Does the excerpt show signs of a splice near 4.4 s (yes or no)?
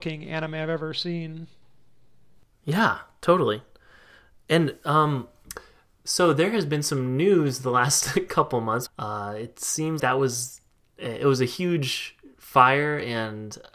no